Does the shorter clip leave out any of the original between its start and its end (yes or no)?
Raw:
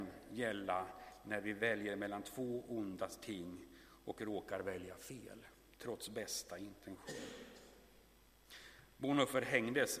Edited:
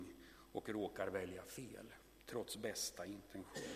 no